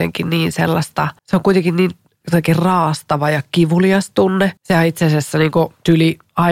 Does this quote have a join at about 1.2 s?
yes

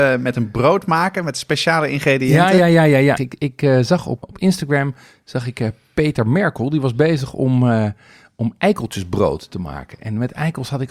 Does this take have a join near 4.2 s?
yes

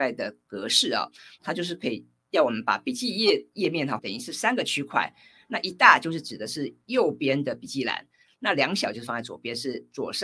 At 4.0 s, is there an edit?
yes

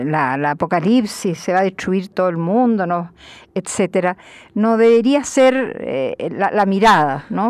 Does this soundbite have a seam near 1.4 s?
no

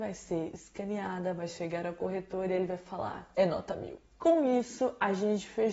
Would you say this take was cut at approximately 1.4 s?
no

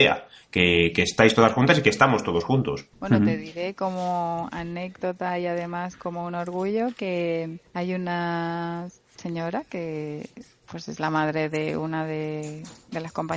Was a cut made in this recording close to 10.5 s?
no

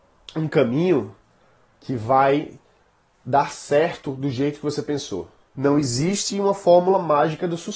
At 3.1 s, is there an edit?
no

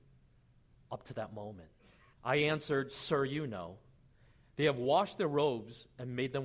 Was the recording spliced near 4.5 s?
yes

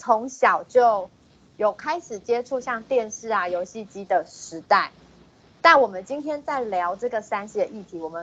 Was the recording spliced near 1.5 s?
no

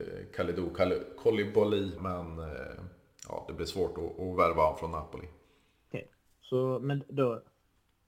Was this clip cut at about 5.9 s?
yes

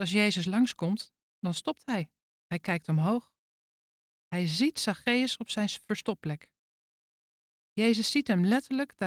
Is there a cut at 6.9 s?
no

